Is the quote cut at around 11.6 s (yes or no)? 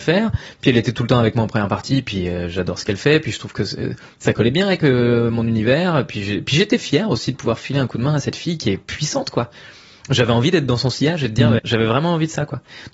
yes